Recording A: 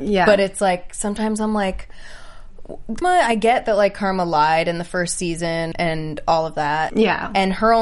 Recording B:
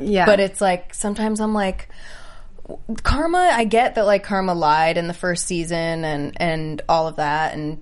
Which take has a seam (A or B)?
A